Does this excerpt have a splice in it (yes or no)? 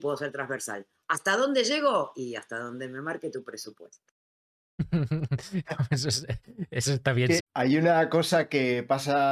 yes